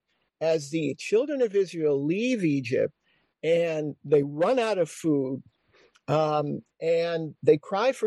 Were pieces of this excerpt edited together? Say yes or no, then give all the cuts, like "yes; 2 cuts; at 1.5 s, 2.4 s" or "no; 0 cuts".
no; 0 cuts